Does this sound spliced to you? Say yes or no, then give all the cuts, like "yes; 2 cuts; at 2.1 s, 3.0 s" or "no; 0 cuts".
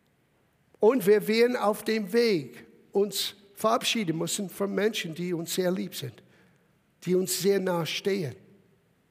no; 0 cuts